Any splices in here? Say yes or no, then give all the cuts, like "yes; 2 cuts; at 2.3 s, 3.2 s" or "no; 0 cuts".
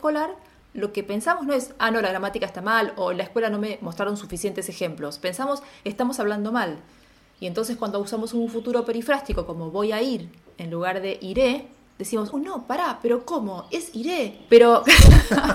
yes; 2 cuts; at 12.3 s, 14.5 s